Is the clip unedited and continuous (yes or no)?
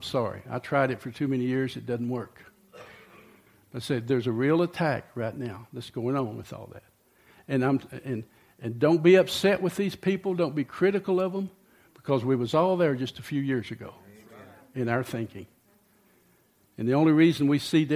yes